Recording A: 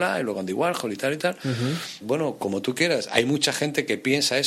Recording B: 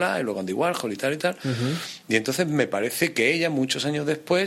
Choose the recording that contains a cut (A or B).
A